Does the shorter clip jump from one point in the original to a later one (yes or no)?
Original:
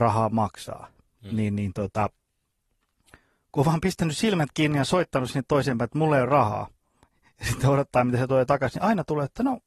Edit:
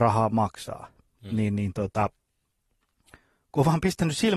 no